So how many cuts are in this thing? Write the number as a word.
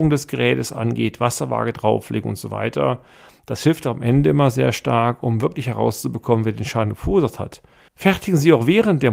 one